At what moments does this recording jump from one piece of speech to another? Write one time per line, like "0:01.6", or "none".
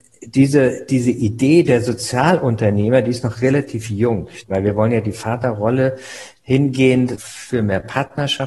0:04.4
0:07.2